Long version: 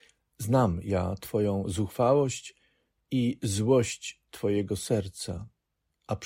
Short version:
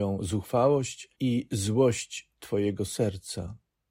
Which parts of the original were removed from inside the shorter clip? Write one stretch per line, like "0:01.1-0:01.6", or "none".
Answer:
0:02.6-0:03.0